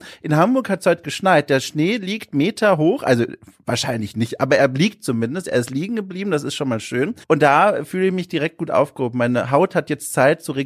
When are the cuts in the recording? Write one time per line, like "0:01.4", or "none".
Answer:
0:07.2